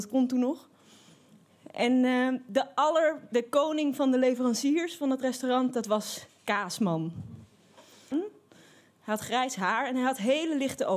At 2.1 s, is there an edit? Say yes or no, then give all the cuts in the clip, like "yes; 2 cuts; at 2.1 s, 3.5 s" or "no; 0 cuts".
no; 1 cut; at 8.1 s